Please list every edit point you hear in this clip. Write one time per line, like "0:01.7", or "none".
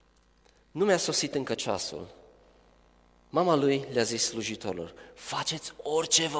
none